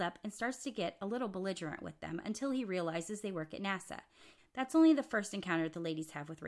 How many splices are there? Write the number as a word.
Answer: one